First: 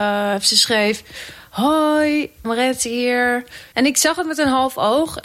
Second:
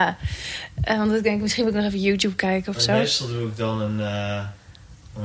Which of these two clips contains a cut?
first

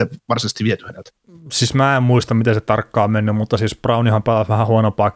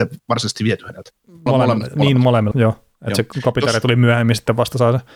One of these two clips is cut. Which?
second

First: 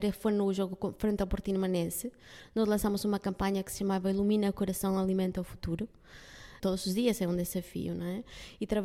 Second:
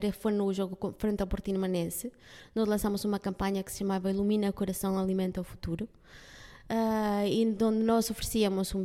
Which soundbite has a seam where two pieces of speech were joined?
first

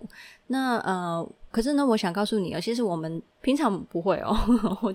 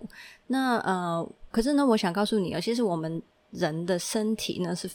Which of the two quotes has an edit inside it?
first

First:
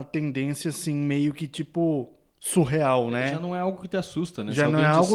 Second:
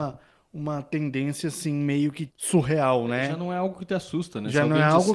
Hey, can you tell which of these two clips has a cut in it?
second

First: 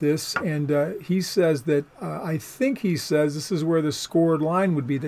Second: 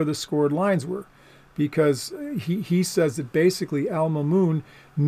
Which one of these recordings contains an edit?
first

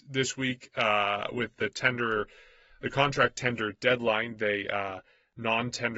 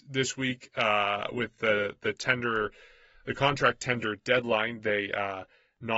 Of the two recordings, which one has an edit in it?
first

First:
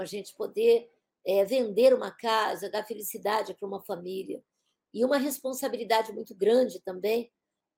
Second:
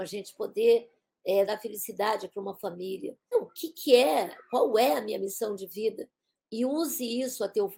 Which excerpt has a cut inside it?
second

